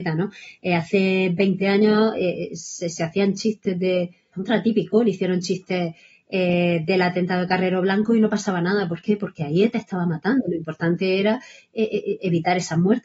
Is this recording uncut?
no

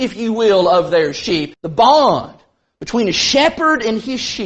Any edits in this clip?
yes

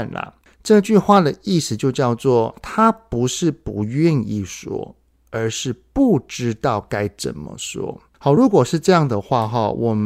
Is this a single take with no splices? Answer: yes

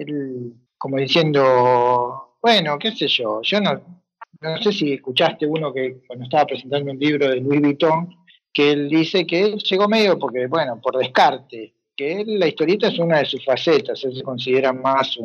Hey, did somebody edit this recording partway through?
no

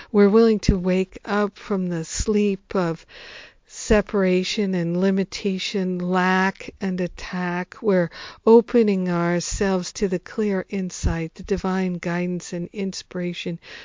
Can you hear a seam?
no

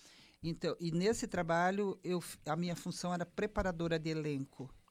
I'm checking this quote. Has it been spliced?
no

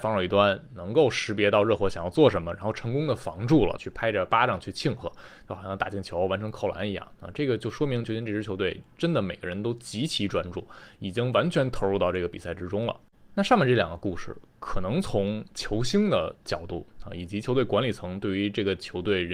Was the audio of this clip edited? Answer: yes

